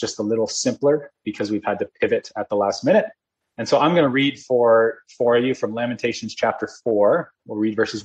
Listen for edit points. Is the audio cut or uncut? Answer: uncut